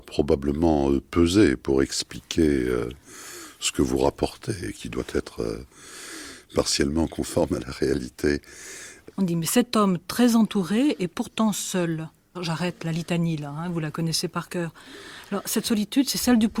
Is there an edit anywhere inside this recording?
yes; 2 cuts; at 9.1 s, 12.3 s

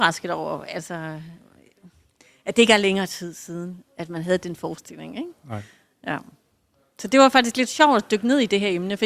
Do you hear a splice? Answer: no; 0 cuts

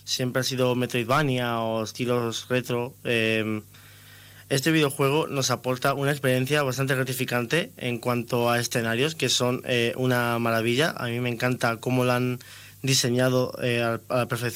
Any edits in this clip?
no; 0 cuts

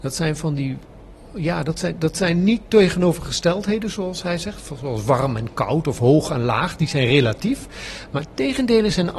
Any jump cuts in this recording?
no; 0 cuts

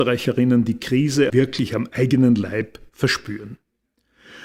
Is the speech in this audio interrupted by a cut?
yes; 1 cut; at 1.3 s

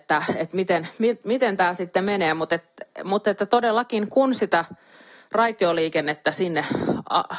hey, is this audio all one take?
yes; 0 cuts

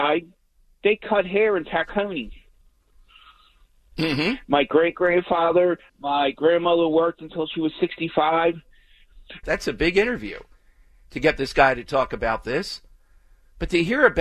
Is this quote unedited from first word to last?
no; 2 cuts; at 5.9 s, 9.4 s

